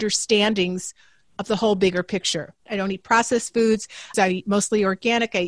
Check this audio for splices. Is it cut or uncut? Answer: cut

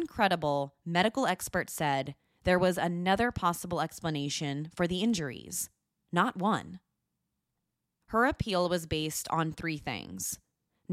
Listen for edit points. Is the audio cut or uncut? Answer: cut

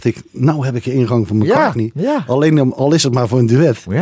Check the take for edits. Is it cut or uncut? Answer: uncut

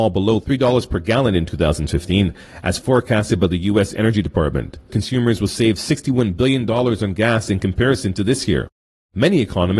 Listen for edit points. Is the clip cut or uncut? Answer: cut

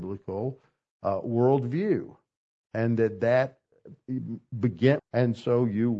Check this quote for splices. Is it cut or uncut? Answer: cut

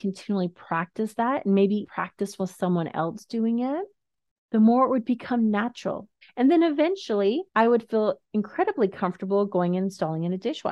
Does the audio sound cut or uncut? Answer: cut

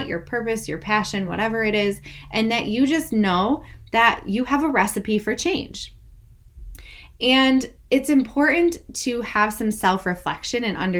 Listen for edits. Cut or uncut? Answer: uncut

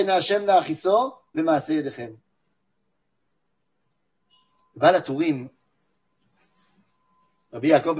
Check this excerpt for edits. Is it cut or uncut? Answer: uncut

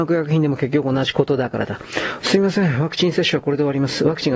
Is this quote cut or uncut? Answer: cut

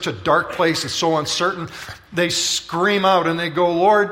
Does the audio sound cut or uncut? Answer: cut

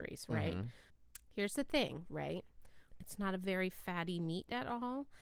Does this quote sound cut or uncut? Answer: cut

